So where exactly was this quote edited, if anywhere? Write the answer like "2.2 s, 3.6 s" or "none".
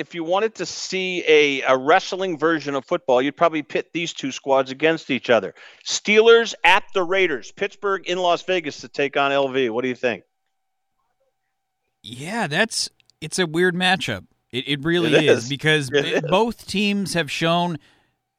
none